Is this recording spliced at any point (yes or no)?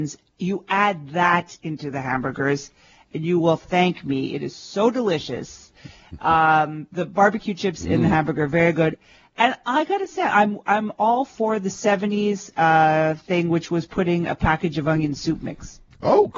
no